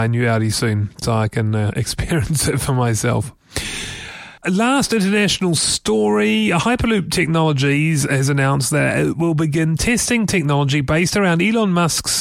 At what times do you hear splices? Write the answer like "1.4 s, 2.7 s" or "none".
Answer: 4.4 s